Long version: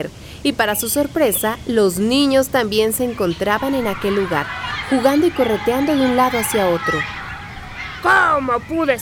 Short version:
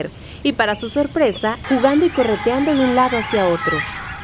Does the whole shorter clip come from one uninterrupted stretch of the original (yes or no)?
no